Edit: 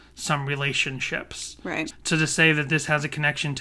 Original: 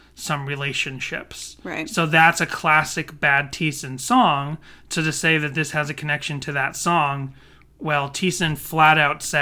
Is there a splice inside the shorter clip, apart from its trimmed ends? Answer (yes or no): yes